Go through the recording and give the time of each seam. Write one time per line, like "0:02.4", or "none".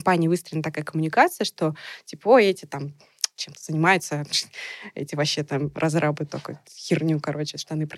none